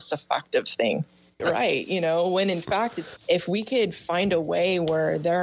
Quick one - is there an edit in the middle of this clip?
yes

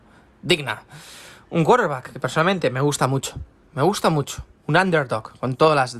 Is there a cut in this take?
no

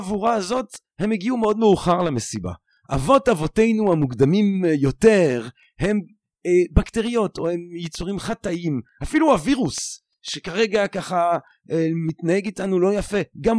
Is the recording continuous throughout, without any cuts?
yes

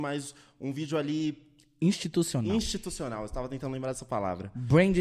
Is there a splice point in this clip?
no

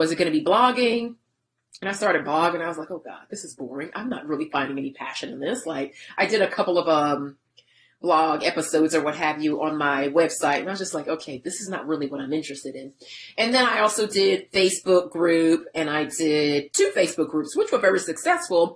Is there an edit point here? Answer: no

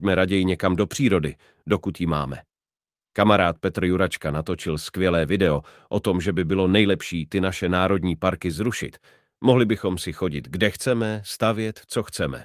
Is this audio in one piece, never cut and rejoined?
yes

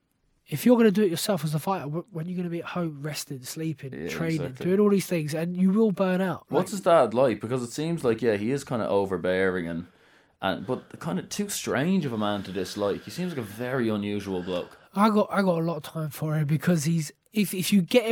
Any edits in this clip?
no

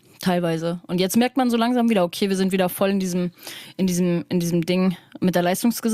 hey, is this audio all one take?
yes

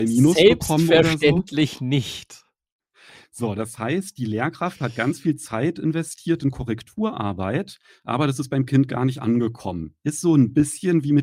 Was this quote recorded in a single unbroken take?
yes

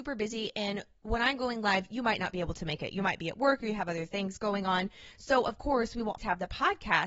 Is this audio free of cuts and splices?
no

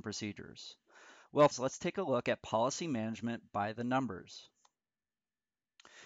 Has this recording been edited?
yes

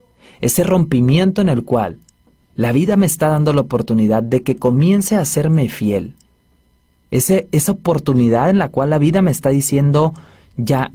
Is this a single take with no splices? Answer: yes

